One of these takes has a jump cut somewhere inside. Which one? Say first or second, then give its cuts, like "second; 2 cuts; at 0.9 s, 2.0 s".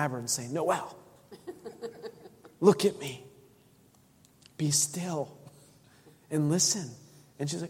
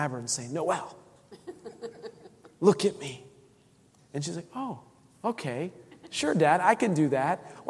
second; 1 cut; at 4.0 s